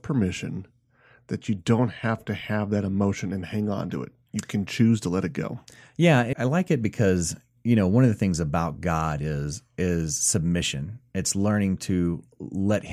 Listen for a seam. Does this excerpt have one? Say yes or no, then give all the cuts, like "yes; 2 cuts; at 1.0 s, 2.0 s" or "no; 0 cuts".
yes; 1 cut; at 6.3 s